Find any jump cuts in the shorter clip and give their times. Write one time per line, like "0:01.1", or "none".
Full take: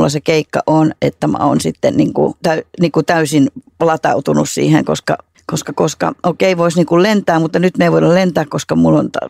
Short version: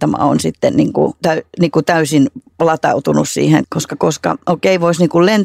0:03.6